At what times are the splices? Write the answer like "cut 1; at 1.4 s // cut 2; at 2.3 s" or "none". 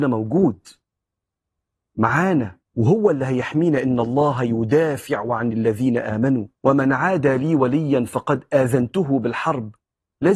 cut 1; at 2.7 s // cut 2; at 6.6 s